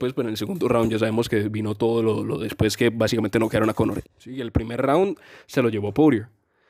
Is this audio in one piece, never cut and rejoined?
no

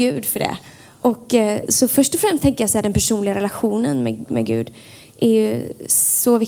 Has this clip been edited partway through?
yes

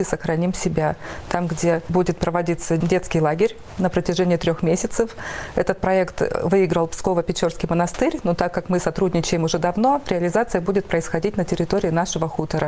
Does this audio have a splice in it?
no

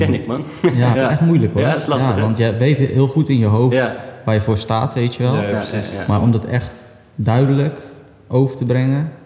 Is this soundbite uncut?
no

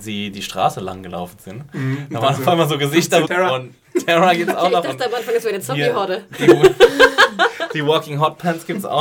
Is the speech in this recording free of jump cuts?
no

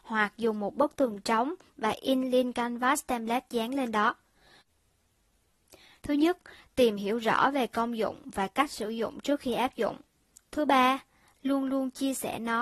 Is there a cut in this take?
yes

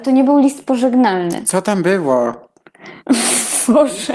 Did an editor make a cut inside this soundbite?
no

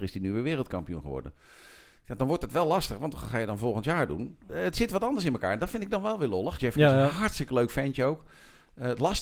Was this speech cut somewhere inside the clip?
yes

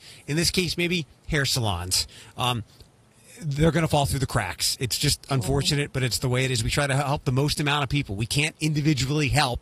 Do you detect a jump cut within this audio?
no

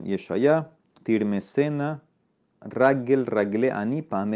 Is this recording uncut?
yes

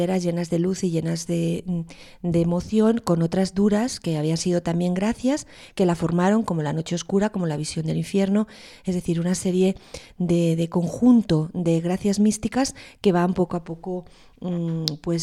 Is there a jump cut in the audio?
no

